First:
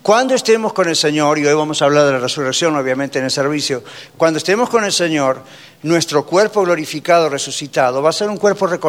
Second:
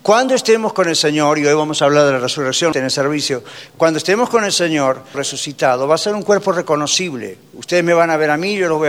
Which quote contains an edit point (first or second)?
second